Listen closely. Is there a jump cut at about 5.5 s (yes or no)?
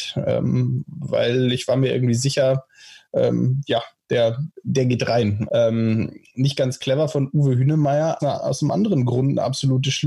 yes